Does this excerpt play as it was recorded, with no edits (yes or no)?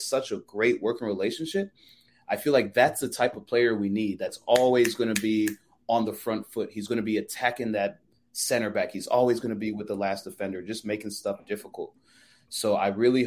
yes